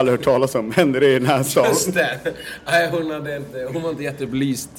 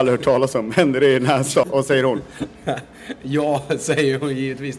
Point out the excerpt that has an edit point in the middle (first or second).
second